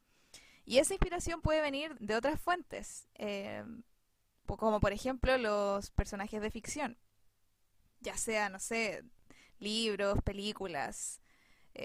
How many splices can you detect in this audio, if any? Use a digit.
1